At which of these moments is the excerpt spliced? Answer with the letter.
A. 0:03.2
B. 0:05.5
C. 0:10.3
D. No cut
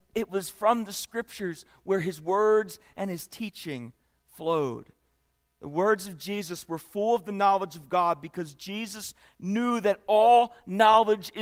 D